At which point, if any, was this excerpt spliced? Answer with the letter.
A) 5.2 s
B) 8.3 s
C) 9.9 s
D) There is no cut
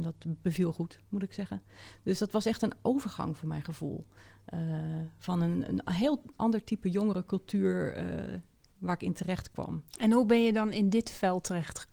C